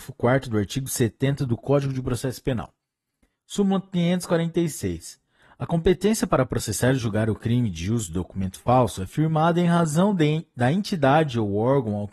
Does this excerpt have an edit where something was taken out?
no; 0 cuts

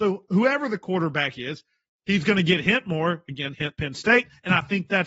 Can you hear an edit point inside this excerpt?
yes; 1 cut; at 3.5 s

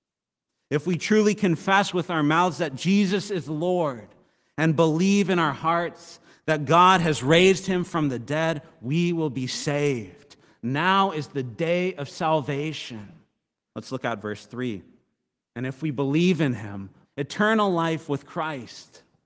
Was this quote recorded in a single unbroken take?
no; 3 cuts; at 13.7 s, 15.4 s, 17.0 s

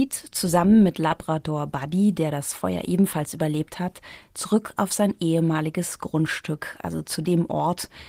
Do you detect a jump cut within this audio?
no; 0 cuts

